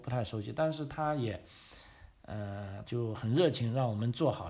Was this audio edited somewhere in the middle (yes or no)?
yes